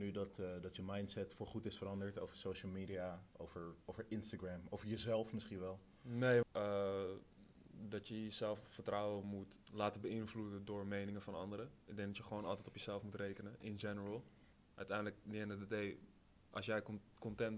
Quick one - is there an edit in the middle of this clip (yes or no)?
yes